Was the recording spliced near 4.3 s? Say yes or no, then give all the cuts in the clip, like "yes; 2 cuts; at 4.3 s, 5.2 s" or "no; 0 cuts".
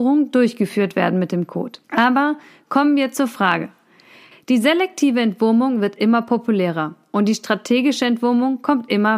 yes; 2 cuts; at 1.8 s, 4.3 s